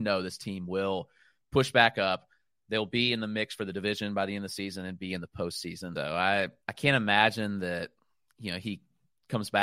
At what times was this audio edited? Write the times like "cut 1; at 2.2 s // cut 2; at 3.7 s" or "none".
cut 1; at 6.0 s